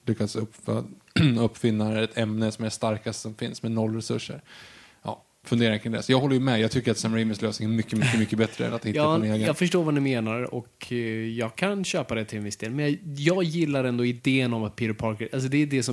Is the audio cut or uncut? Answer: uncut